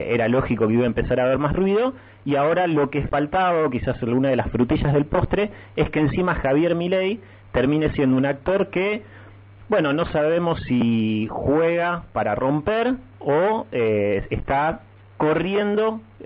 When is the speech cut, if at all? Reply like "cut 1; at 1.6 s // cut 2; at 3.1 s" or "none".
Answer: cut 1; at 13.1 s